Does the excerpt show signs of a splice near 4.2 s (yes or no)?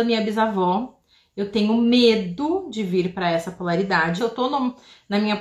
yes